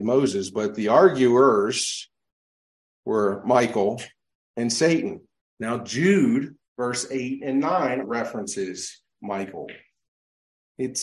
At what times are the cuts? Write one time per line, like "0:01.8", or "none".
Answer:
0:05.4
0:06.6
0:08.0